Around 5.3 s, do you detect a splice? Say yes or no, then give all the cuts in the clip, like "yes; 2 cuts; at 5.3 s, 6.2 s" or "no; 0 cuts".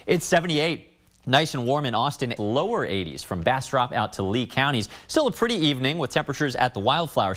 no; 1 cut; at 2.4 s